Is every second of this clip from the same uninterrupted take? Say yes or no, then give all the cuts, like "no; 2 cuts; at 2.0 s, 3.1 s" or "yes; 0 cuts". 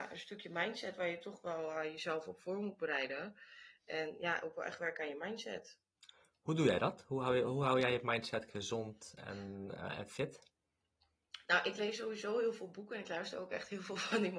yes; 0 cuts